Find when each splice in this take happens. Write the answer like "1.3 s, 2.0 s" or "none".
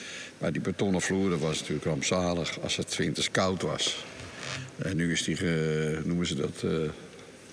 none